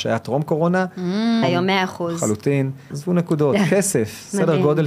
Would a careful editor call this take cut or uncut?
cut